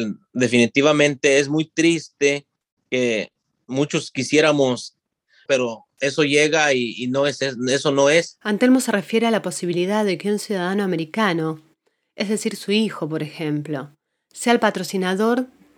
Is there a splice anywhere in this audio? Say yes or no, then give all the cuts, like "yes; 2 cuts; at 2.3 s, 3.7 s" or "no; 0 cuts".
yes; 1 cut; at 5.5 s